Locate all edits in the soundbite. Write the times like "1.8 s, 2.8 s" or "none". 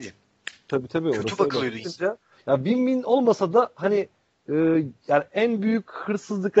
1.8 s